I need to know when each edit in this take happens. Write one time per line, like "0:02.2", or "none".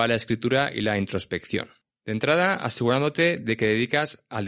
0:01.9